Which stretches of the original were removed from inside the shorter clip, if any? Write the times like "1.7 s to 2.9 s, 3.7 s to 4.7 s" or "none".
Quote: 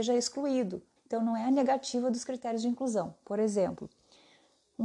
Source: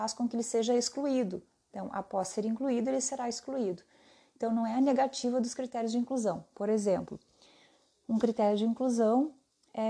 1.6 s to 4.3 s